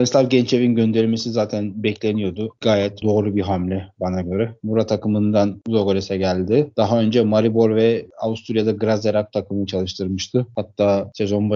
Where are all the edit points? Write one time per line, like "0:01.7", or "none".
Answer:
0:04.6